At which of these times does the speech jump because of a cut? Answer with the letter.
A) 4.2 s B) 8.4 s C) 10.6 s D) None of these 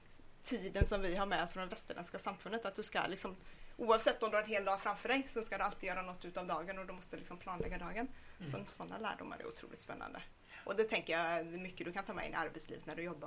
D